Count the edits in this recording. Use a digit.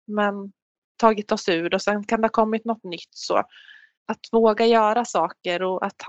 1